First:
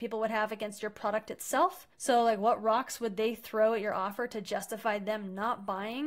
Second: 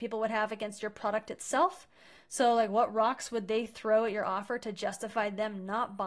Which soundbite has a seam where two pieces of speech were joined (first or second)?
first